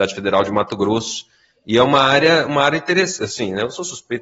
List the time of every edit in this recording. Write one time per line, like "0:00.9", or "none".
none